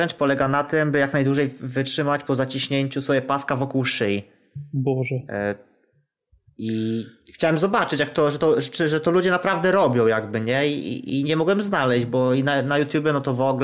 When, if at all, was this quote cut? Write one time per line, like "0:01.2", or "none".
none

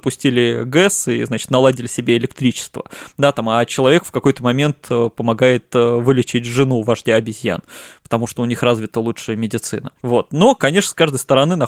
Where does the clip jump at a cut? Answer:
none

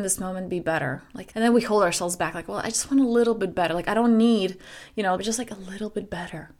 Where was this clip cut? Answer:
0:01.3
0:05.2

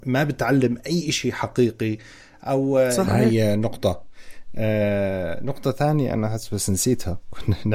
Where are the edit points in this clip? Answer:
0:03.1

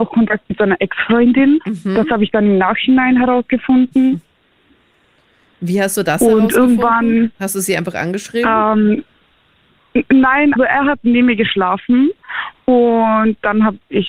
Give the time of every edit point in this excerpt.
0:10.6

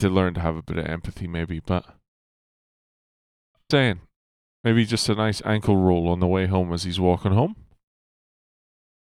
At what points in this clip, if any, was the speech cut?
0:03.7

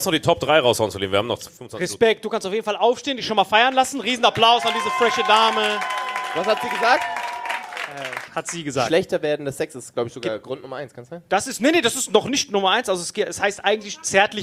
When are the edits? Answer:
0:08.3

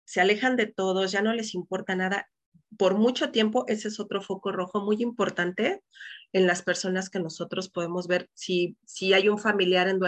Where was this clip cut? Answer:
none

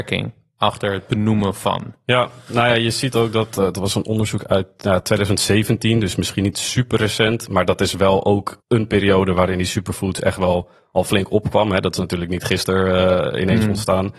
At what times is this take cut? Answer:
0:08.6

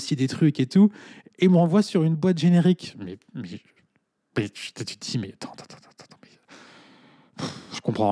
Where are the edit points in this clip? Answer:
none

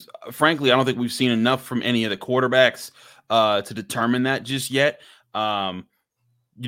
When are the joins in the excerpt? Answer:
none

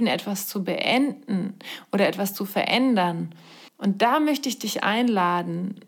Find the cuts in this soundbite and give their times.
0:03.7

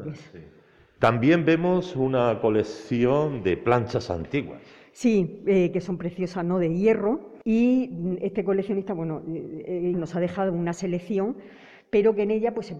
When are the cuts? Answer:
0:07.4
0:09.9

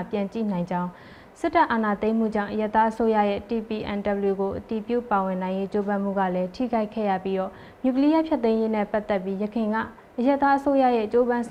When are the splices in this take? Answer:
none

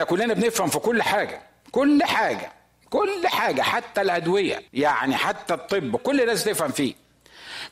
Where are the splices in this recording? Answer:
0:04.7
0:06.0

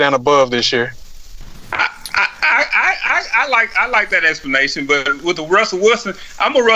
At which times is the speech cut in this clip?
none

